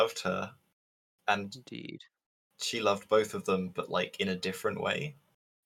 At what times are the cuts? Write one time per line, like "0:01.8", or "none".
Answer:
none